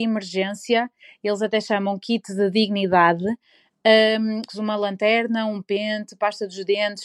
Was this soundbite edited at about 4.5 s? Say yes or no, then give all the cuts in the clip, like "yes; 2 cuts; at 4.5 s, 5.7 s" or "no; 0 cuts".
yes; 1 cut; at 4.5 s